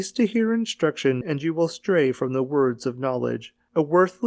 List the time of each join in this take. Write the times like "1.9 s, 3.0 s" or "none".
1.2 s